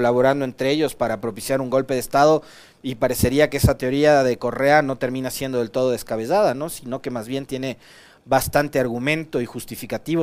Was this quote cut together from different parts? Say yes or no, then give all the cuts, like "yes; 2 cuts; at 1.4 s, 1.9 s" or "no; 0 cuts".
no; 0 cuts